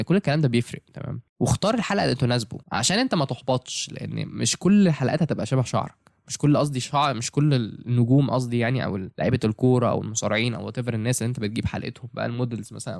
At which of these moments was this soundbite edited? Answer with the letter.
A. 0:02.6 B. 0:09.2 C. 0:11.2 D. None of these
A